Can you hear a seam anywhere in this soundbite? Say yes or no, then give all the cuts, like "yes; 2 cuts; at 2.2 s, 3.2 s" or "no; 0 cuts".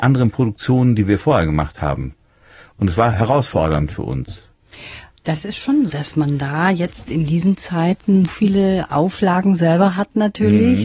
yes; 2 cuts; at 5.9 s, 8.3 s